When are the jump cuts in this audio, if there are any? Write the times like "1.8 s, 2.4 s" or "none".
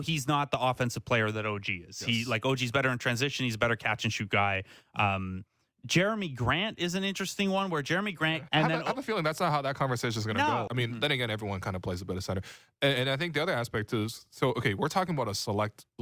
8.5 s, 10.7 s